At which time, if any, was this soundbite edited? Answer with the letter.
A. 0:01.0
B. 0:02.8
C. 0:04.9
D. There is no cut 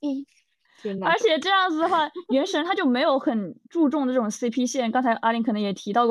D